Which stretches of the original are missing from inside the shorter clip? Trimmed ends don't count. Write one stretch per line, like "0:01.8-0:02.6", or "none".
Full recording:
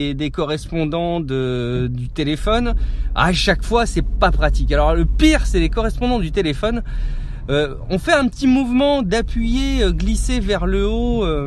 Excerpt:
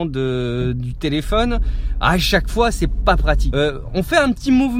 0:04.7-0:07.5